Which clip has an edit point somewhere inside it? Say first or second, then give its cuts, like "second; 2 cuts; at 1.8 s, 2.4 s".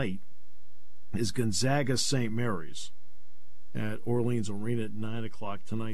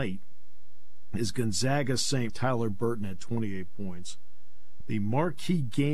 second; 2 cuts; at 2.3 s, 4.8 s